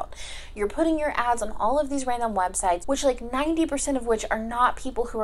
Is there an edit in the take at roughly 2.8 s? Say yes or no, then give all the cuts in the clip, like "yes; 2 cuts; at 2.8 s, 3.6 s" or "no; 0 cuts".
yes; 1 cut; at 2.8 s